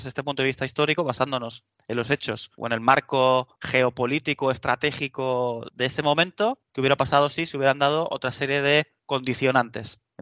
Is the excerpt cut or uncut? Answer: uncut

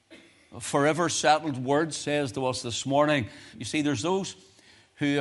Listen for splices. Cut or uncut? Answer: cut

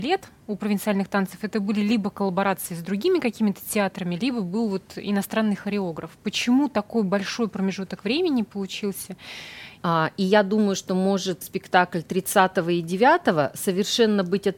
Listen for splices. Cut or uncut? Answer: cut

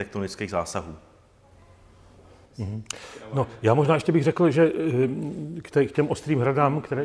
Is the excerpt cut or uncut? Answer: uncut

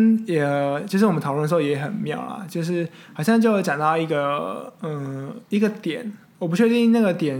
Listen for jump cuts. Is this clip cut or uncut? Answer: uncut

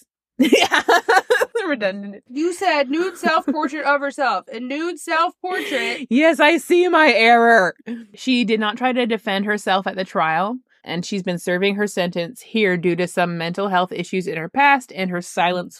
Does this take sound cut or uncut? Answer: cut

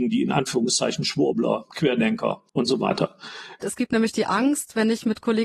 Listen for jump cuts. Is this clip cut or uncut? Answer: cut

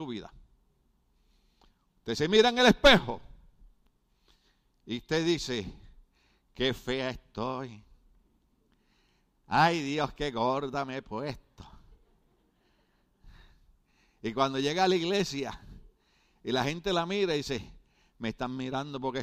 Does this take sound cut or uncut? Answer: uncut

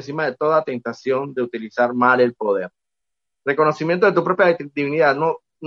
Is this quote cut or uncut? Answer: uncut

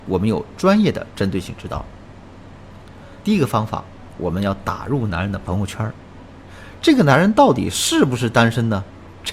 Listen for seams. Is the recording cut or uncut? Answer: cut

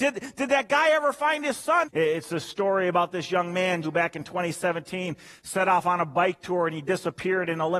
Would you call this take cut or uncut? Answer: cut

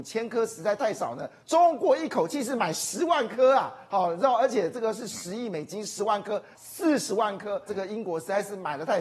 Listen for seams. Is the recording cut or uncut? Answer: cut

